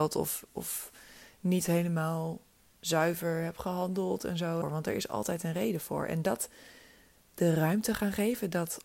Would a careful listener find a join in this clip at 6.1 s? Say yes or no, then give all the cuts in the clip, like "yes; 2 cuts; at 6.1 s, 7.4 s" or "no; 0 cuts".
no; 1 cut; at 4.6 s